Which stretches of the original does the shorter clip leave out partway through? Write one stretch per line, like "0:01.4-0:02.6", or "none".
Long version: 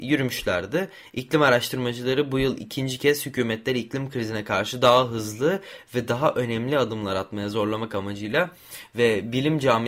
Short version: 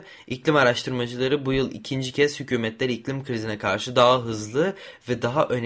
none